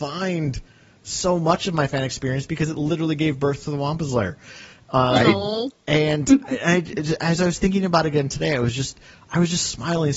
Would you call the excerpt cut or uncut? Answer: uncut